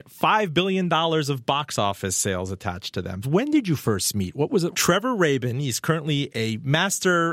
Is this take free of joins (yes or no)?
no